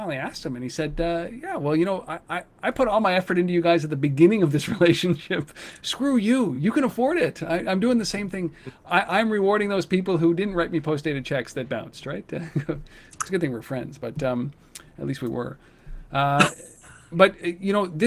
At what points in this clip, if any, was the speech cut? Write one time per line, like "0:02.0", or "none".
none